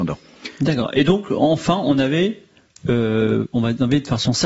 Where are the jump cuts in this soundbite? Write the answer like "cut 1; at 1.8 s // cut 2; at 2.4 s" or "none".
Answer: none